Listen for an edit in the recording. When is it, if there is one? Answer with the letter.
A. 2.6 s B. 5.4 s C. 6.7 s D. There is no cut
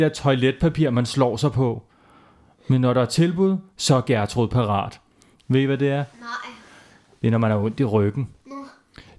B